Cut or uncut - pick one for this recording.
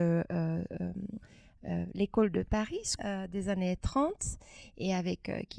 cut